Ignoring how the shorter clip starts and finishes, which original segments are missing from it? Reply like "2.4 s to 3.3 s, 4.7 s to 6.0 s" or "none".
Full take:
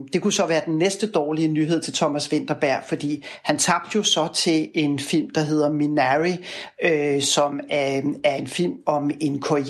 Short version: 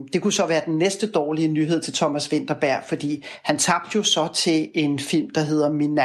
none

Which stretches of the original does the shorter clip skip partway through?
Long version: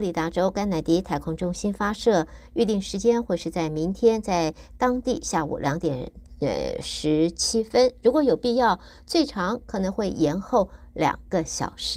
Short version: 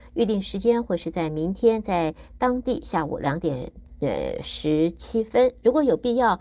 none

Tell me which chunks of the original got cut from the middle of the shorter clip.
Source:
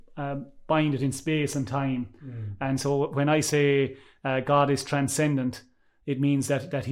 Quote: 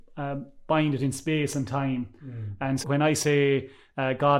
2.8 s to 3.1 s

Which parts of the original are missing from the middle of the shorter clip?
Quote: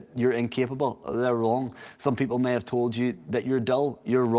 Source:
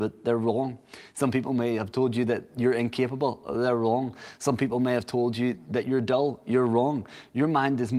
none

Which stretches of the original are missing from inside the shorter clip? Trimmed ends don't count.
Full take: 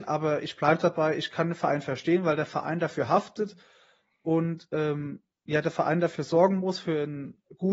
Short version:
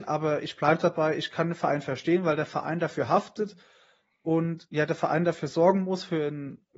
4.7 s to 5.4 s

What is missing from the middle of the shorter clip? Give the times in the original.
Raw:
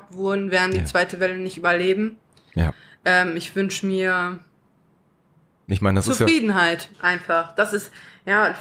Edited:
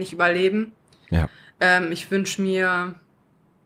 none

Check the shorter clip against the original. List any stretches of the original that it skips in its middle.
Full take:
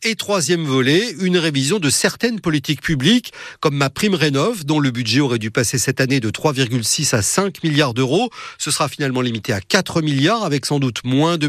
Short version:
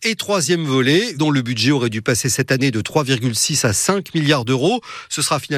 1.1 s to 4.6 s

